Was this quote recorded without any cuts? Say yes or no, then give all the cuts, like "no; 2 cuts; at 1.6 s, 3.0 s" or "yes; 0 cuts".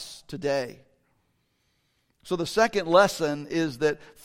yes; 0 cuts